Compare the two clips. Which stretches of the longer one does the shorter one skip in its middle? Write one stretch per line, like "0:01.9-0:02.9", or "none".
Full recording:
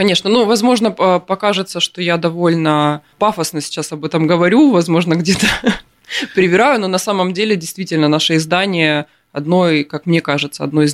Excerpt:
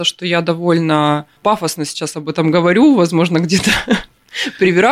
none